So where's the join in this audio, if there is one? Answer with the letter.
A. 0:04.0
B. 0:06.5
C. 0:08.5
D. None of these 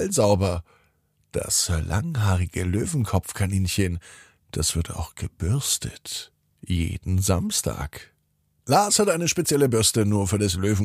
D